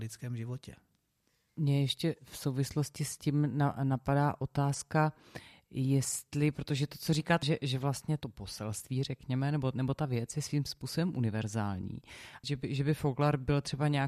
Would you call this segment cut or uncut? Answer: cut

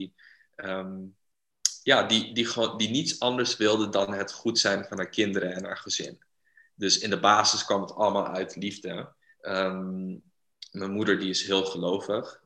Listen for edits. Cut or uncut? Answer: cut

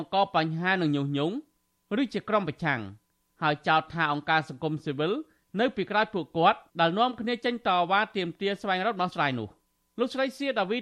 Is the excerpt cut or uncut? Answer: cut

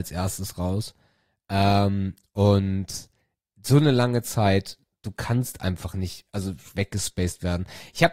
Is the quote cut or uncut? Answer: uncut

